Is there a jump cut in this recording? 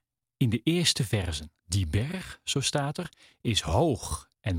yes; 1 cut; at 1.6 s

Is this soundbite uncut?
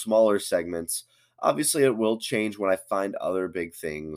yes; 0 cuts

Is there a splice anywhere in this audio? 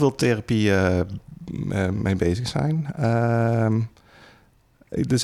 no; 0 cuts

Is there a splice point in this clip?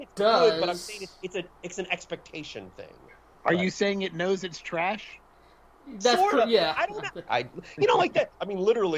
yes; 1 cut; at 7.3 s

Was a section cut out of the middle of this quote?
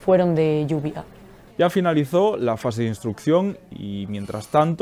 yes; 1 cut; at 1.5 s

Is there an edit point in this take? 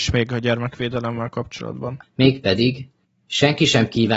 yes; 1 cut; at 2.0 s

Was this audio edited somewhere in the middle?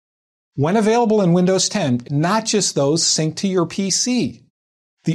yes; 1 cut; at 2.0 s

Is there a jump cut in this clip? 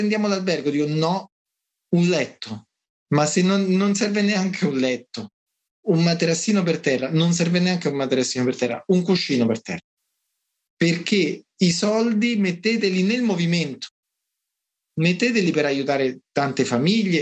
no; 0 cuts

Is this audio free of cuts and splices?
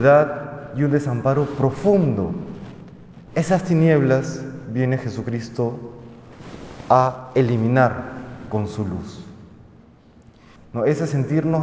no; 1 cut; at 10.6 s

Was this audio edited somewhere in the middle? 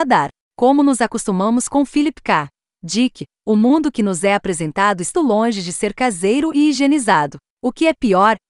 yes; 2 cuts; at 5.1 s, 7.5 s

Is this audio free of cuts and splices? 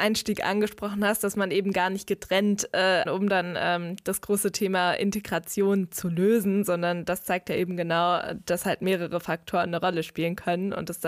no; 1 cut; at 3.1 s

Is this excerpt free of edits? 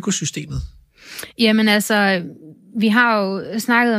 yes; 0 cuts

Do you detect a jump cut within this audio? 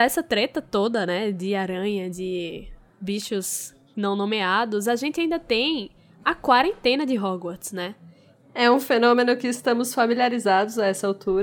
no; 0 cuts

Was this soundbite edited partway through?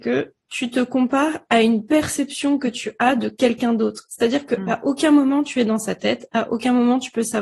no; 0 cuts

